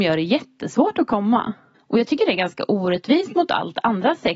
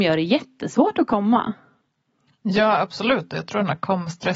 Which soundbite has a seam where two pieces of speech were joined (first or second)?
first